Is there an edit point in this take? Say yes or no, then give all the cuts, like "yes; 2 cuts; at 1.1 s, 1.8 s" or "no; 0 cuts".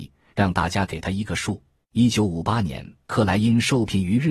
yes; 2 cuts; at 1.8 s, 3.0 s